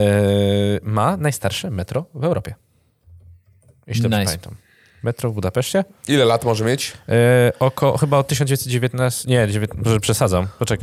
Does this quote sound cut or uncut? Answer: uncut